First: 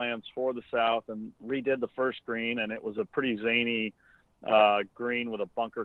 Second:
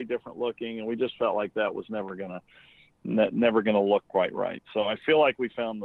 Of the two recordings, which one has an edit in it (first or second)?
first